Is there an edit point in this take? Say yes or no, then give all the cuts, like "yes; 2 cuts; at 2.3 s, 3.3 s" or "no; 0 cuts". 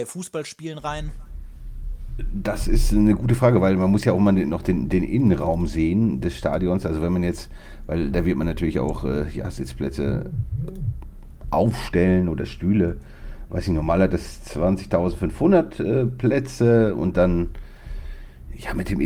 no; 0 cuts